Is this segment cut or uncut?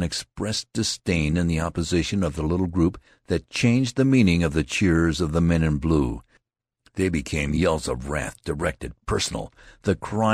uncut